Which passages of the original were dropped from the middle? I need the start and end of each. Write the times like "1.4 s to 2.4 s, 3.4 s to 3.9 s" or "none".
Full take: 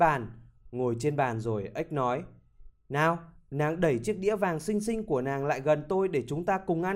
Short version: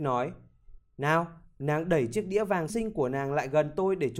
4.6 s to 4.8 s